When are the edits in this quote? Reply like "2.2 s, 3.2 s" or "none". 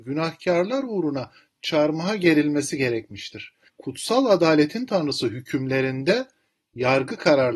3.7 s